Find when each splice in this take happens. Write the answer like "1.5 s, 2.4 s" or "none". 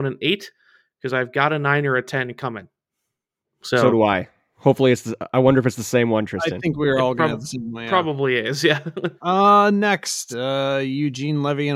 9.2 s, 10.3 s